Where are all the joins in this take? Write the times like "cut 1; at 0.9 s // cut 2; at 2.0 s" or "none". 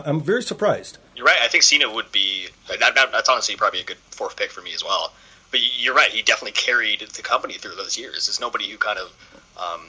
cut 1; at 1.1 s

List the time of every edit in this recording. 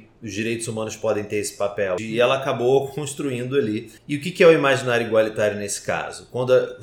cut 1; at 2.0 s // cut 2; at 4.0 s

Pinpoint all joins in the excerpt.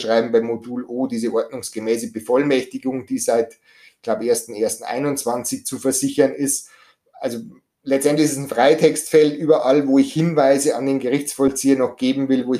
none

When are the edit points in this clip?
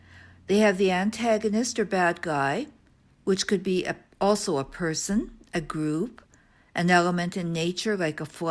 none

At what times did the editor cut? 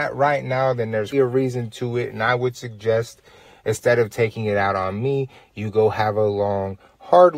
cut 1; at 1.1 s

